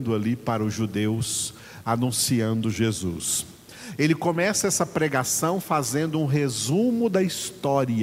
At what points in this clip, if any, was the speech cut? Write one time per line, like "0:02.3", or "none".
none